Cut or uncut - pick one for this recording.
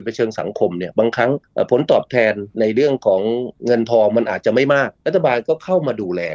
uncut